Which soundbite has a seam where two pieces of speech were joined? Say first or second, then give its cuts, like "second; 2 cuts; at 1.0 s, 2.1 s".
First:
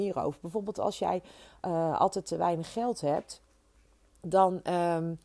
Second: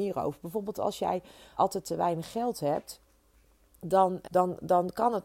second; 2 cuts; at 1.6 s, 4.2 s